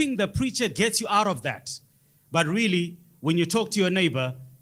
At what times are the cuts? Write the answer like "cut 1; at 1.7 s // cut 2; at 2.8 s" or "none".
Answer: none